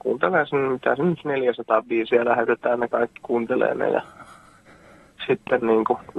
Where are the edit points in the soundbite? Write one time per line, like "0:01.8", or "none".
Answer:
none